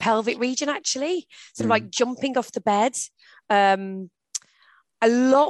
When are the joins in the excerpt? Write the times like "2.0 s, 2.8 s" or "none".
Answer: none